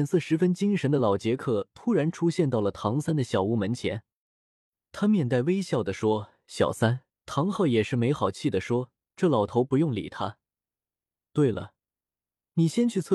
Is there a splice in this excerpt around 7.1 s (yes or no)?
yes